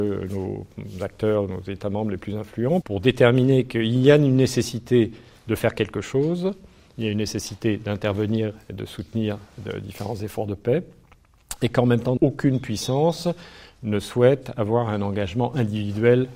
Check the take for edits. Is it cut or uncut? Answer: cut